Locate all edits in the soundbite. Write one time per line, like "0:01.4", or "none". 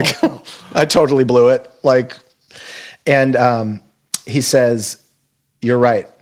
none